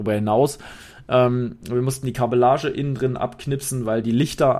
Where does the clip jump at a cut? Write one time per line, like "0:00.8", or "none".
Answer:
none